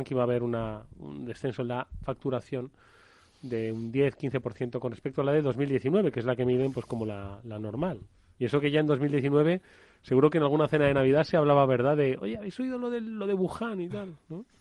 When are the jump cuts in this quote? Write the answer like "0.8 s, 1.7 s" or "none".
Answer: none